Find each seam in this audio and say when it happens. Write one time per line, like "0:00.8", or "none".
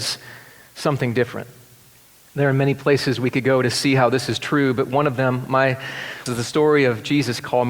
0:02.3
0:06.3